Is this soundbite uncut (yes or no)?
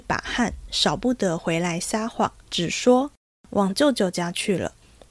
no